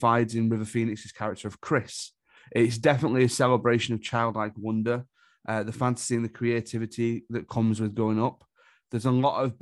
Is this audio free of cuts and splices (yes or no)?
no